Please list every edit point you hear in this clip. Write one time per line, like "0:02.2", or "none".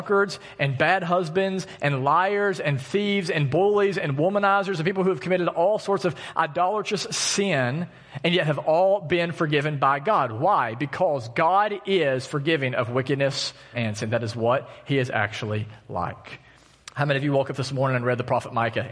0:13.7
0:16.9